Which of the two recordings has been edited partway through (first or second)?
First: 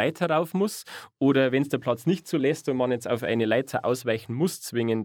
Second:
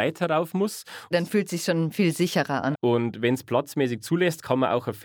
second